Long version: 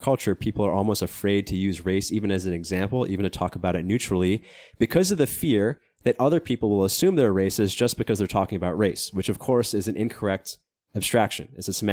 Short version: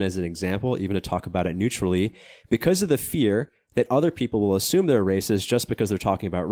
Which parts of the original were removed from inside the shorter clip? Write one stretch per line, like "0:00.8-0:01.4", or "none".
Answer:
none

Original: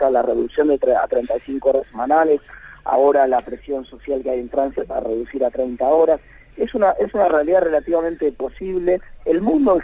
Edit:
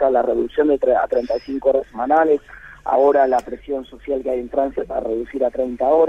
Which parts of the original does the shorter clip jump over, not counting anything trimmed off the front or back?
none

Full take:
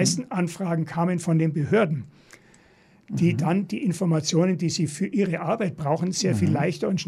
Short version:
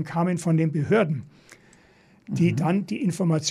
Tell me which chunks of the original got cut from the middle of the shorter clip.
none

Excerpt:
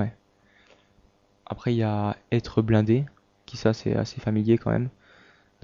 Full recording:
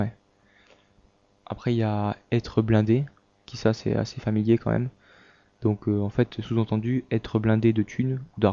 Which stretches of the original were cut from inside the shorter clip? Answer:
none

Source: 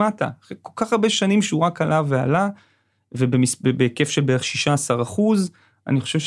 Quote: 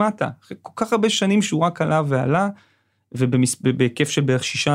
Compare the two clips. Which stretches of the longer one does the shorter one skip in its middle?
none

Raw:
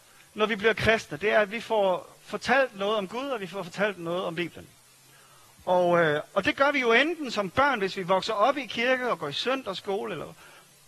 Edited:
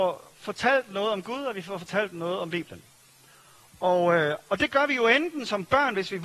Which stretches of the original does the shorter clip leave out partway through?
none

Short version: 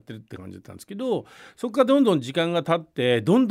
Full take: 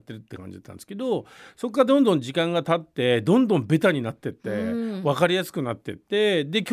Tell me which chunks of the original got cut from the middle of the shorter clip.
none

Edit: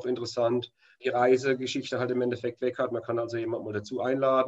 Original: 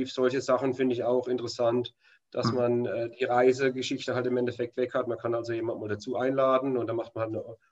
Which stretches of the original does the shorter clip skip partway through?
0:02.2-0:03.2

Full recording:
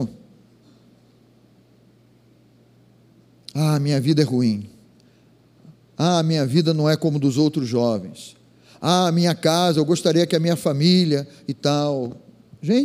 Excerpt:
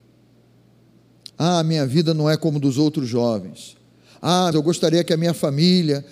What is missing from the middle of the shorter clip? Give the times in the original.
0:03.5-0:05.9
0:09.1-0:09.7

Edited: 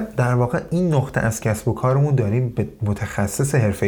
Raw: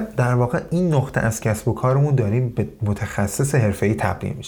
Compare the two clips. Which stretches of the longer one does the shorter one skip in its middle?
none

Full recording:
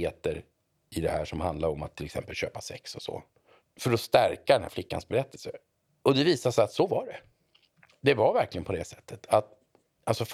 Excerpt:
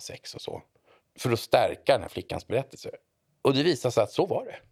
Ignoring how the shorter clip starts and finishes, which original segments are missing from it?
none

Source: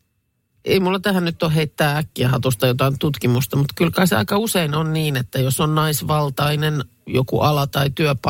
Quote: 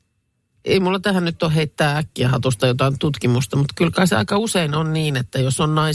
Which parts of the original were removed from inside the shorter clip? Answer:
none

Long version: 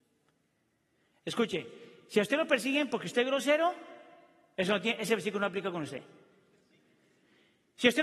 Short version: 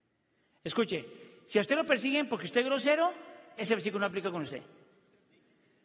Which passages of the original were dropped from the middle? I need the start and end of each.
0:04.2-0:05.0

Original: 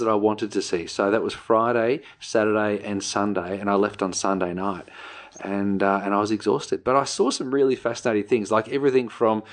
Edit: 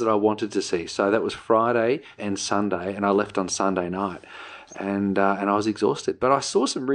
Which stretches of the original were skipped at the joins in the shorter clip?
0:02.2-0:02.8

